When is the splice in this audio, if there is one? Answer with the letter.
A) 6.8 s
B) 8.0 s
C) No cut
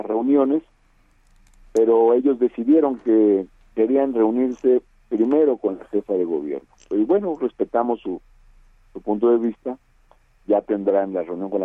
A